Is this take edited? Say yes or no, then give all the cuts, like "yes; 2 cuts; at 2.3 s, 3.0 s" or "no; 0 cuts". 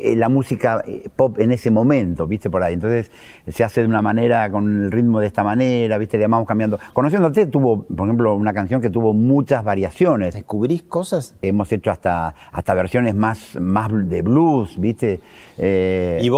yes; 2 cuts; at 10.3 s, 11.4 s